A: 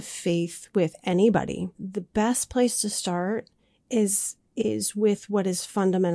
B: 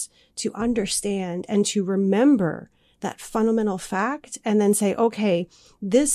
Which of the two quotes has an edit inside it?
A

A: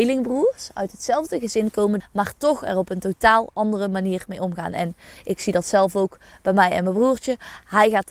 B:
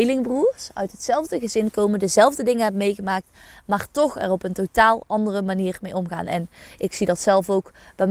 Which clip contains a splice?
A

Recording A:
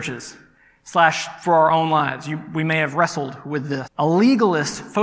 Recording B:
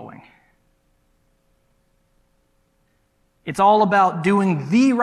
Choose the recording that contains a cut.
A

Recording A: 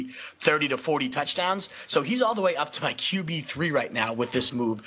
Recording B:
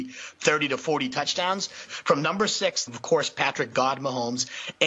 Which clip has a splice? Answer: B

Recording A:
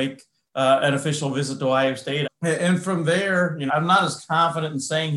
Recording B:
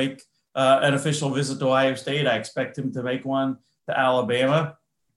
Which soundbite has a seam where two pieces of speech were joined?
A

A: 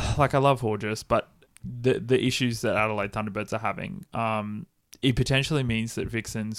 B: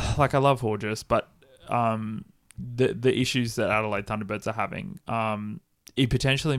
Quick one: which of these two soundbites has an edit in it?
A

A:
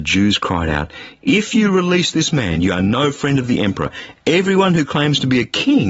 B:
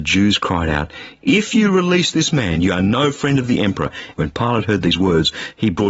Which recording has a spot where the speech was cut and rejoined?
B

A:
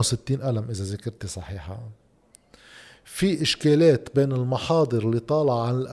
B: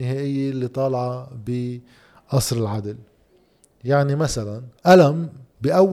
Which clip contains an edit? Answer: B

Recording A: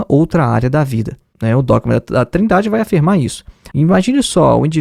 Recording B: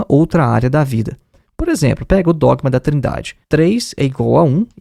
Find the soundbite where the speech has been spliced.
A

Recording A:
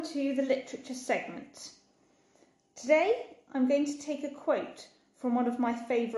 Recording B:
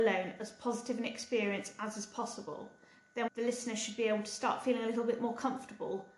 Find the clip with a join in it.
B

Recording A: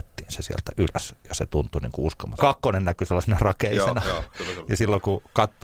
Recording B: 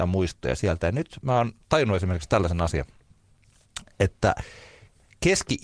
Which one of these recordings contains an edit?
A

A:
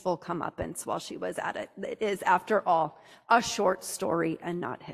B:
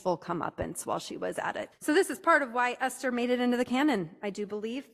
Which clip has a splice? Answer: B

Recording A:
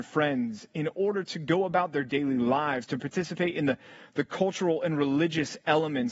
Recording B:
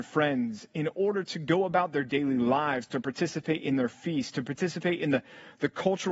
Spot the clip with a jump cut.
A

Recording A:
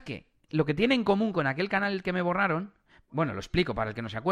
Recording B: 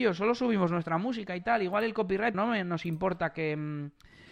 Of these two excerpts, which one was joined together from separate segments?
B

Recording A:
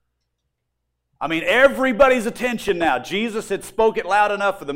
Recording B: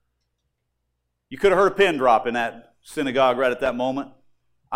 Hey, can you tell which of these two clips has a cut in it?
A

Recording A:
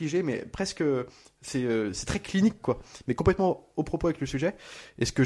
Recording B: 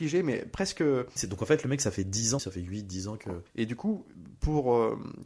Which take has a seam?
B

